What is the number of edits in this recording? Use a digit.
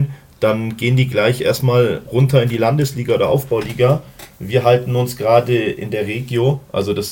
0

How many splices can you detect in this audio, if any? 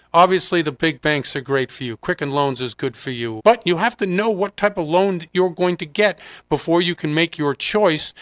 1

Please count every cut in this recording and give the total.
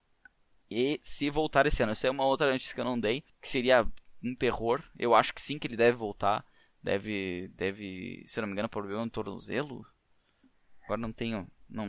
1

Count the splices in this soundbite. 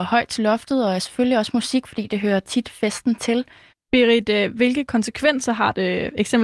1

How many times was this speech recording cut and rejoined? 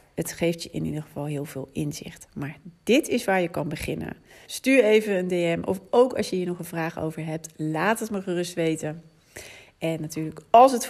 1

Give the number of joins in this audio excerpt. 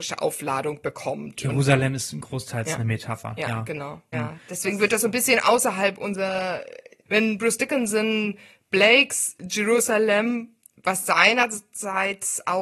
2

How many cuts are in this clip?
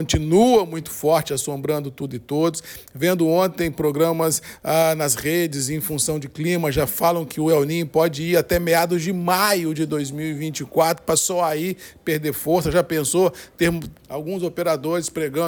1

